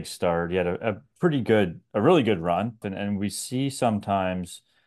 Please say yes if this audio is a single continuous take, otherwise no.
no